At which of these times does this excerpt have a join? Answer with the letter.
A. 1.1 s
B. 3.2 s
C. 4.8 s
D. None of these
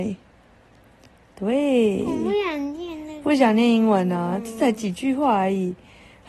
D